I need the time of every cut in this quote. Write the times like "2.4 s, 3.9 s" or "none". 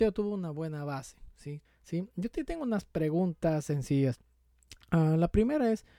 1.6 s